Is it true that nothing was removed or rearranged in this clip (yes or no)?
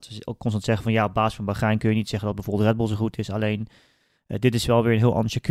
yes